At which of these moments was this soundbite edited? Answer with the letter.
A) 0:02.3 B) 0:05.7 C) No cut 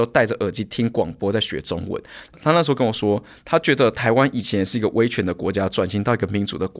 A